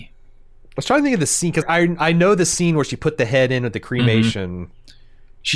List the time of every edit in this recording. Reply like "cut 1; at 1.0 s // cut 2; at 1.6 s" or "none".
cut 1; at 1.6 s